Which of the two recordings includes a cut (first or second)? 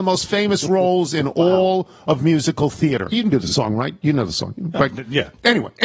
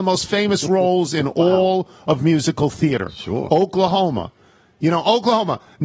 first